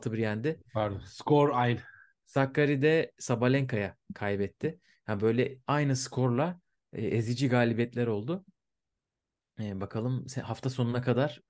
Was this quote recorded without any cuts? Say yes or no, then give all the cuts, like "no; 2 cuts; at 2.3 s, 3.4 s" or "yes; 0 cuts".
yes; 0 cuts